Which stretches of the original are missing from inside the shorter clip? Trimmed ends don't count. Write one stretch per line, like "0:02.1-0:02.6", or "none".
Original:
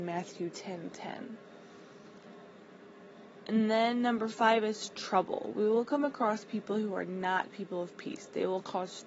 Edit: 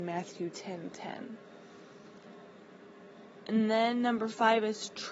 none